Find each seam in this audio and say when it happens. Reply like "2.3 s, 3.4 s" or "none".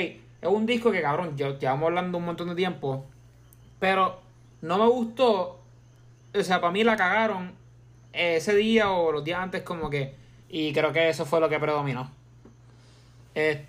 10.4 s